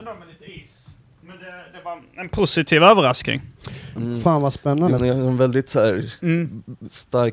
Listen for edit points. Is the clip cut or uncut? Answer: cut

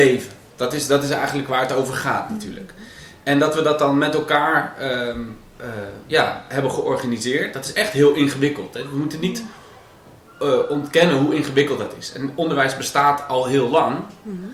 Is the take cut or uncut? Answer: uncut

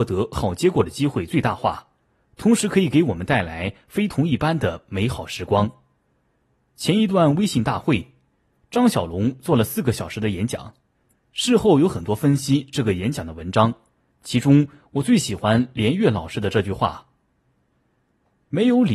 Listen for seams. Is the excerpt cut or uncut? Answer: uncut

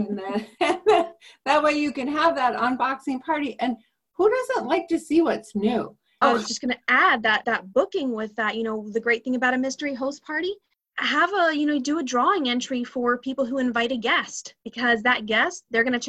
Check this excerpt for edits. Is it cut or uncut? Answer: cut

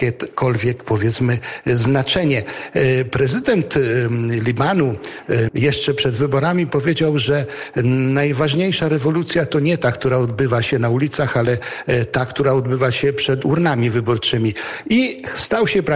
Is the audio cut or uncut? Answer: cut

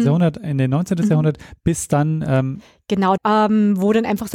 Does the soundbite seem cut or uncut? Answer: cut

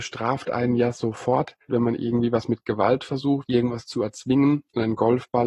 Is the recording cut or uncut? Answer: cut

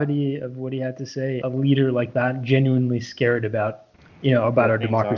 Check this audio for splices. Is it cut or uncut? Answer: cut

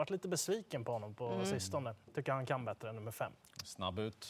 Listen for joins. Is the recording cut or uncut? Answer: uncut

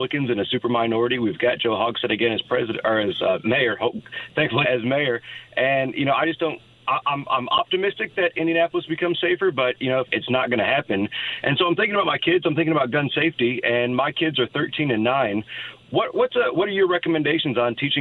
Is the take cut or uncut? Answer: cut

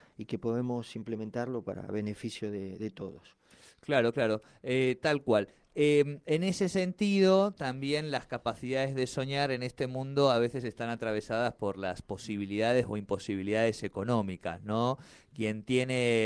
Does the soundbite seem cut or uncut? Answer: uncut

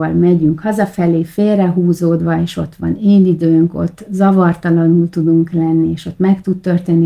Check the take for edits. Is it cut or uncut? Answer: uncut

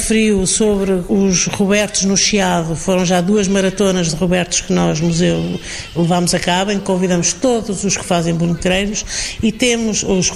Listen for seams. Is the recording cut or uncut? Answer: uncut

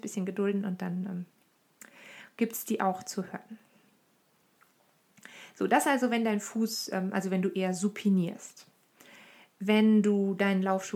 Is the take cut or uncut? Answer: uncut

